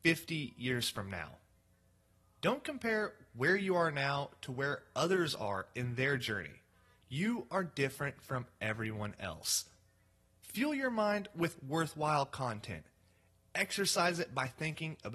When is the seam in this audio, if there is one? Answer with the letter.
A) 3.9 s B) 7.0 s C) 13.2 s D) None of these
D